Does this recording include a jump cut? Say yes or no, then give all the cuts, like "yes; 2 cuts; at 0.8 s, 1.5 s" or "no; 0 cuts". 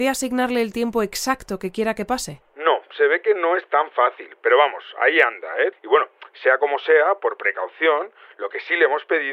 yes; 1 cut; at 5.7 s